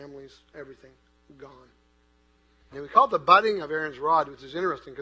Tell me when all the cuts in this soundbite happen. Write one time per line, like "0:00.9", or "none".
0:02.7